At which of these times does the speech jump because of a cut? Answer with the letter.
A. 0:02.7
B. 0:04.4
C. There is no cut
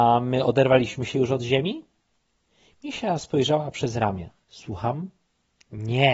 B